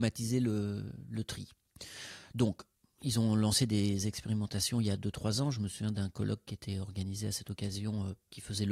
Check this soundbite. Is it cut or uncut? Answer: uncut